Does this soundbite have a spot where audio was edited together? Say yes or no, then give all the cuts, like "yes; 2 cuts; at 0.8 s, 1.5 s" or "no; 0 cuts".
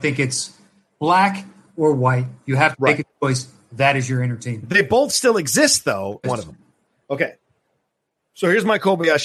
yes; 1 cut; at 6.2 s